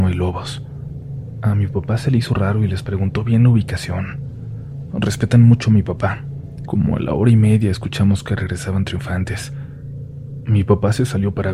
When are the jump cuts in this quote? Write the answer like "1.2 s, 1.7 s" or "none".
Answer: 6.7 s